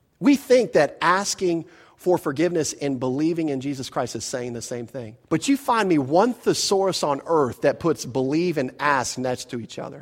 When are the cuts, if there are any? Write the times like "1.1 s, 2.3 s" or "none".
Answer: 5.2 s